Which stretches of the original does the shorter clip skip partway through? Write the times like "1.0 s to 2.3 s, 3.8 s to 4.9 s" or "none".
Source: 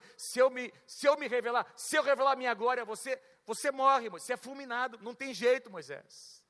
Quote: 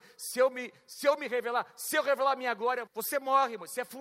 2.9 s to 3.4 s